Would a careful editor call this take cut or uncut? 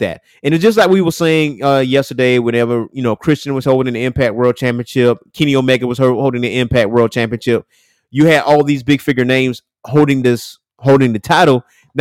uncut